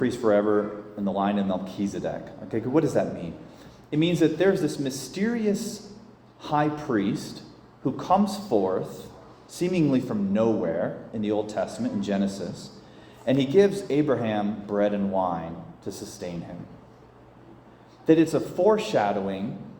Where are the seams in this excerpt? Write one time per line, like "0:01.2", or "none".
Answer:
none